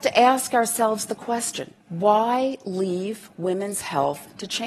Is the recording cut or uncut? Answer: cut